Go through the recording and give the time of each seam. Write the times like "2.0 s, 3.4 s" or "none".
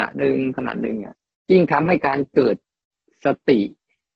none